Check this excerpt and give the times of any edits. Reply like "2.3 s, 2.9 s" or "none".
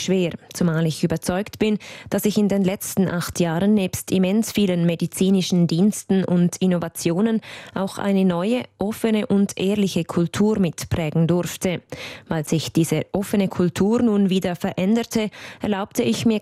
none